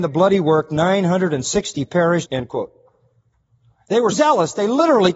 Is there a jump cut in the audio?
yes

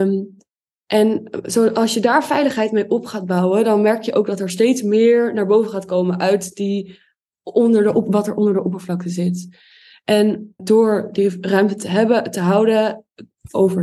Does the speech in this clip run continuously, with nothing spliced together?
no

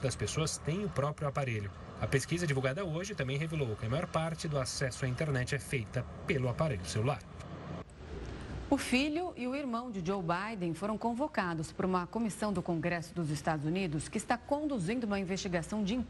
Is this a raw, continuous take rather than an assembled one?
yes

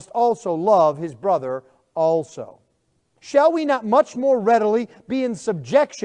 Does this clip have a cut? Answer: yes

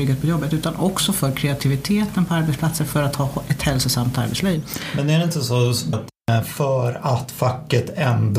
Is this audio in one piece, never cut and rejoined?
no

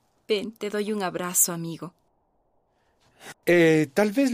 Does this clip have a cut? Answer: yes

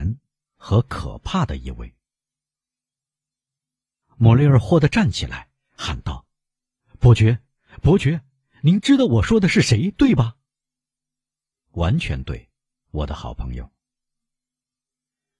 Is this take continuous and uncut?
no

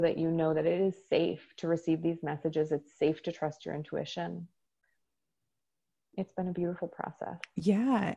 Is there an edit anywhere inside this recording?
no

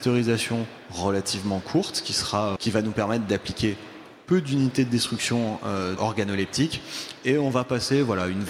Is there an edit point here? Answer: yes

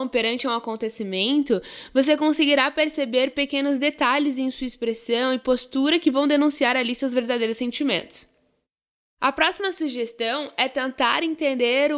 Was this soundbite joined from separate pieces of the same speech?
no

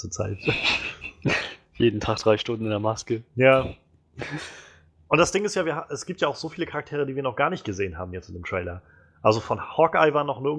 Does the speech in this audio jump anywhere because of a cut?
no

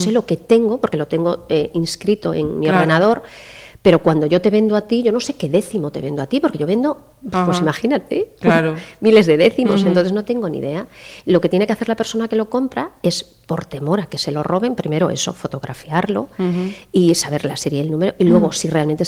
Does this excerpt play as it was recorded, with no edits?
yes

